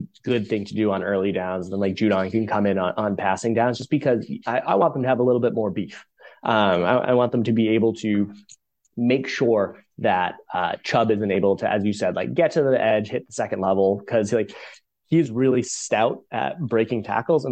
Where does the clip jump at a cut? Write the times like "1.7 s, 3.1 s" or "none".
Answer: none